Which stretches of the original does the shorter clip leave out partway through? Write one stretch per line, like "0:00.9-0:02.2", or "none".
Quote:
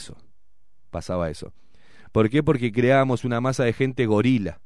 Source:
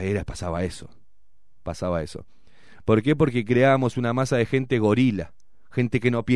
none